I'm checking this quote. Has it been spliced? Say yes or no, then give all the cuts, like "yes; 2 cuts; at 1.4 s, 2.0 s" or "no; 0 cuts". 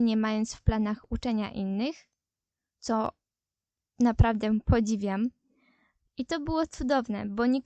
yes; 1 cut; at 6.1 s